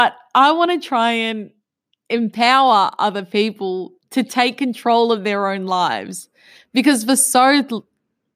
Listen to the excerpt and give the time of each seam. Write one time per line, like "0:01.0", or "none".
none

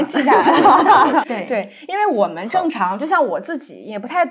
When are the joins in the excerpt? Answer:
0:01.2

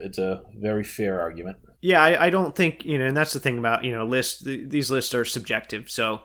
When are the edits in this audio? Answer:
none

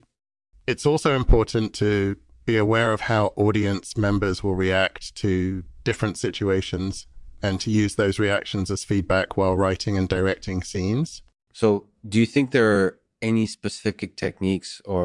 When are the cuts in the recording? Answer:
0:11.4

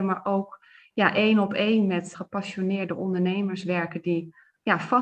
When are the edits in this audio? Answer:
0:02.1

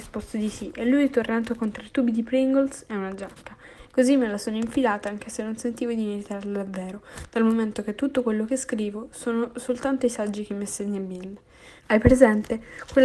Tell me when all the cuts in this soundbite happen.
0:03.9
0:11.8

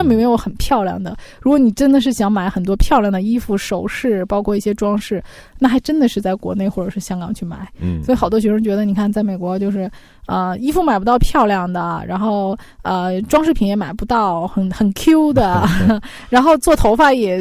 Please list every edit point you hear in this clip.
none

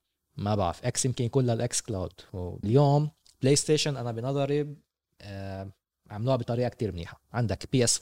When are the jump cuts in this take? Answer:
0:02.6

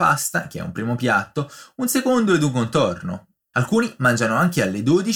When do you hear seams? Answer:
0:03.5

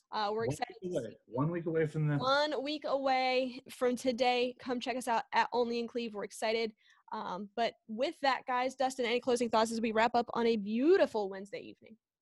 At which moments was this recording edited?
0:03.7

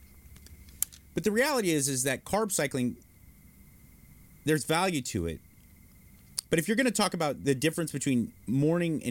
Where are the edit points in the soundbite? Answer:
none

